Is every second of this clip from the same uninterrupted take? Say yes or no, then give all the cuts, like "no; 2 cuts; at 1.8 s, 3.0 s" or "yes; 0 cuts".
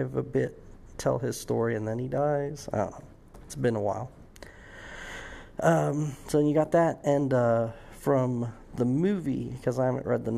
yes; 0 cuts